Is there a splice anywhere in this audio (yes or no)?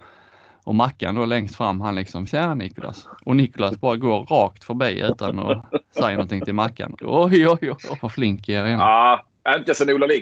yes